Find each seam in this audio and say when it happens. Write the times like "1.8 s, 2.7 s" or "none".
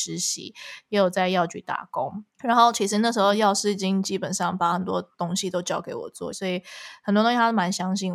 2.3 s, 6.3 s